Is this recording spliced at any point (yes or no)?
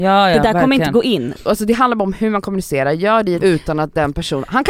yes